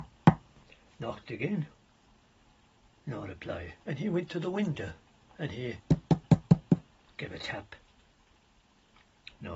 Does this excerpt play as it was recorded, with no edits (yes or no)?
no